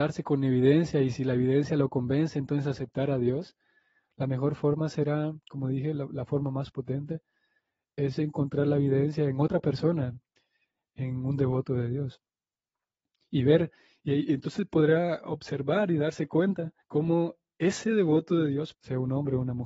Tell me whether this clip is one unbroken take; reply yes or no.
no